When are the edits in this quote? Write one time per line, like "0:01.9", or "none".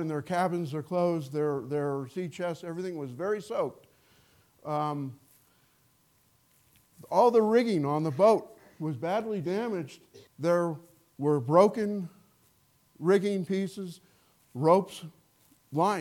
0:10.3